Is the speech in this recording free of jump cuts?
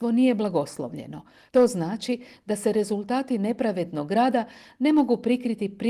no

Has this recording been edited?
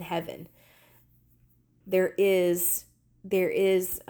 yes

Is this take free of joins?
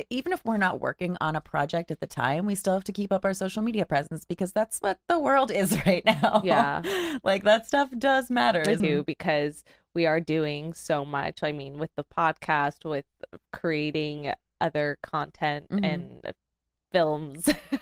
no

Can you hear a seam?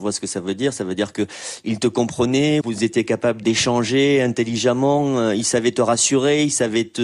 yes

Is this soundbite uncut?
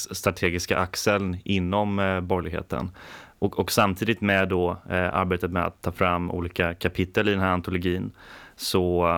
yes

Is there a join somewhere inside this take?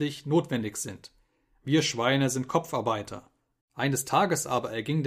yes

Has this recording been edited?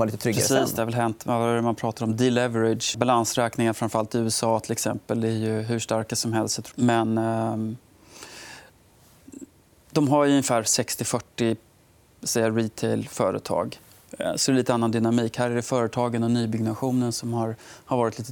yes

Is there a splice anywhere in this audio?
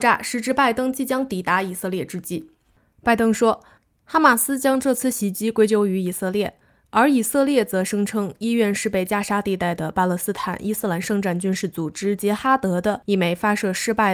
no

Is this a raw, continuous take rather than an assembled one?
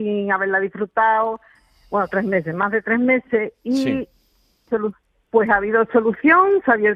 no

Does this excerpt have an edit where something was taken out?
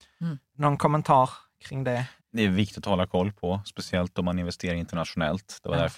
yes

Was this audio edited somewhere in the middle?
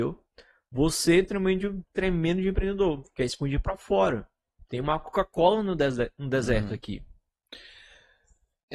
no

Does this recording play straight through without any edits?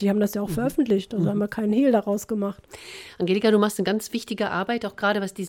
yes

